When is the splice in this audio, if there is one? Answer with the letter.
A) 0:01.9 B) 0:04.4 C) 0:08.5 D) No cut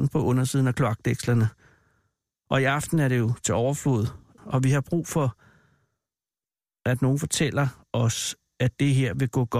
B